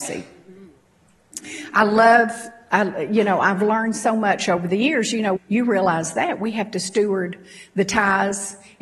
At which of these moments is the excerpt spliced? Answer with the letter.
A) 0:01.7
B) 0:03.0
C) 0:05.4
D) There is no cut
C